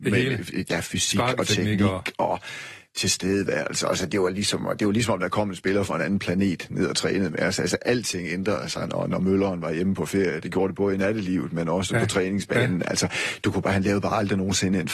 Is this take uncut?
yes; 0 cuts

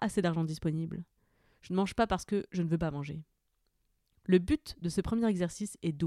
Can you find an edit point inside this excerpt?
no; 0 cuts

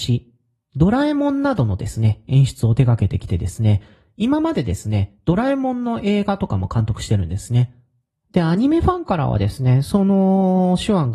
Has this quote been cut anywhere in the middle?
no; 0 cuts

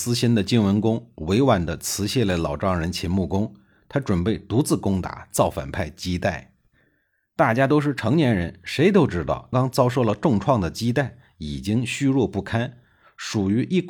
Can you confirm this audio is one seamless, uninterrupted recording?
no; 1 cut; at 9.5 s

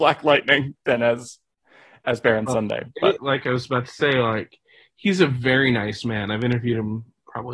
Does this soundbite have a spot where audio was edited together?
yes; 1 cut; at 3.2 s

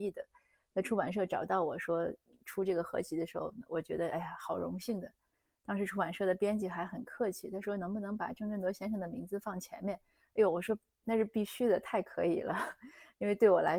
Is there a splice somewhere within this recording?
no; 0 cuts

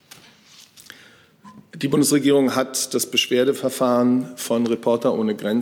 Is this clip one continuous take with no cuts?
yes; 0 cuts

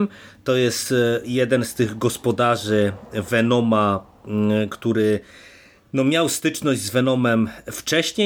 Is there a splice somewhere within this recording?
no; 0 cuts

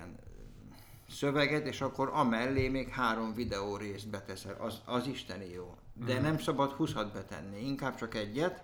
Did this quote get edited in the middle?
no; 0 cuts

